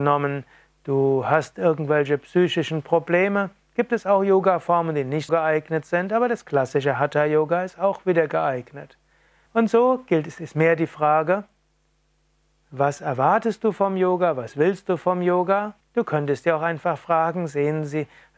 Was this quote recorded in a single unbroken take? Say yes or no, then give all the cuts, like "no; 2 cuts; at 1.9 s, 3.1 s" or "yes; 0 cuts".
no; 3 cuts; at 5.3 s, 9.5 s, 15.8 s